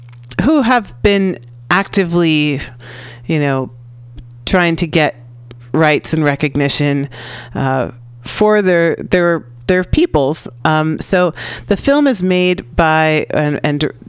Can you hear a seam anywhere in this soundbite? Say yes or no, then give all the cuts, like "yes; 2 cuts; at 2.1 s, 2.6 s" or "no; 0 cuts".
yes; 1 cut; at 10.6 s